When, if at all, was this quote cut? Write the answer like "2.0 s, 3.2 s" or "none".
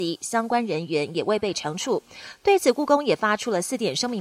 none